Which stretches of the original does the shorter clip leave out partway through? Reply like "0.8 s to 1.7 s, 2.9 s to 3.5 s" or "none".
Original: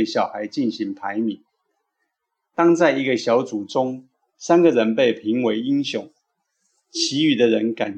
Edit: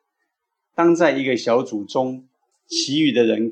4.3 s to 6.7 s